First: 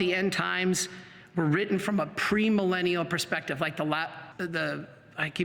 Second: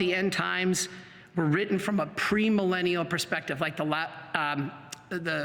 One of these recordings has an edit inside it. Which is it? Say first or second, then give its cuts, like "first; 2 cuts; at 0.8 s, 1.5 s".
first; 1 cut; at 4.3 s